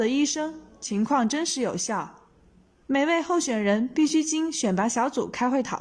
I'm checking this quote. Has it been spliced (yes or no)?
yes